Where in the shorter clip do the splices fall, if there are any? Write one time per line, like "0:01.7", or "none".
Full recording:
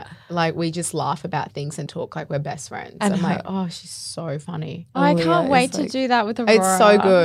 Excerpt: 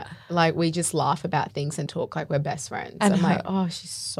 none